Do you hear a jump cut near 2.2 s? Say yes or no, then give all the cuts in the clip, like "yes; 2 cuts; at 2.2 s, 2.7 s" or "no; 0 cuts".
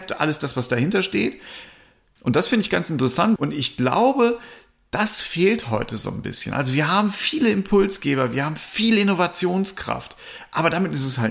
yes; 2 cuts; at 2.2 s, 3.4 s